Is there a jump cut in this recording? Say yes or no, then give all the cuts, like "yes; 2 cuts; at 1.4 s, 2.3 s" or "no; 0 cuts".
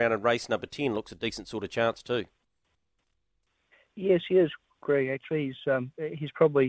no; 0 cuts